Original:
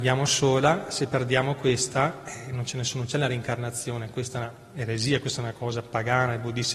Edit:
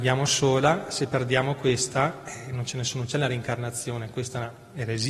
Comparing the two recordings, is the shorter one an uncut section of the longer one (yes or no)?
yes